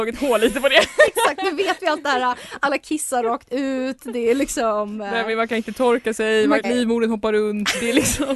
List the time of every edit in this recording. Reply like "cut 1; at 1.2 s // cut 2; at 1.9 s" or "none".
cut 1; at 6.6 s